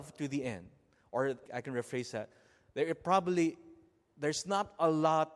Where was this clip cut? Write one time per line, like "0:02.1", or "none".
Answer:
0:01.5